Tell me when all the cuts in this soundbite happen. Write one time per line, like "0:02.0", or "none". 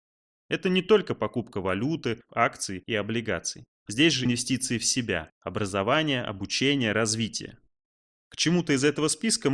0:02.3
0:03.8